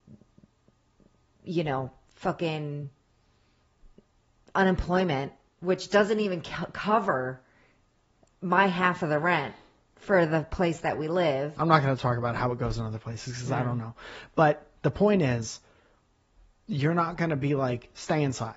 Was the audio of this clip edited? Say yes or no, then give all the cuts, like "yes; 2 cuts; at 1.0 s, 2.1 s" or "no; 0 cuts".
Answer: yes; 1 cut; at 11.5 s